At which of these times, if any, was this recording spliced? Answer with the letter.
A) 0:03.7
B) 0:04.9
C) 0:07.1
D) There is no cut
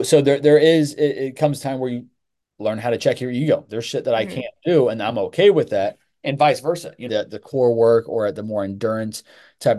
C